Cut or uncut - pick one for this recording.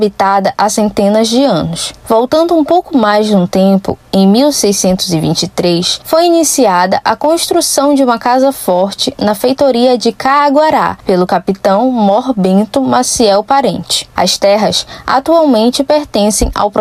uncut